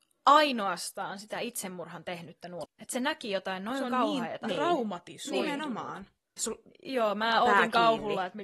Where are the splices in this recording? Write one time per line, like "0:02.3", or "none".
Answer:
0:02.6
0:06.4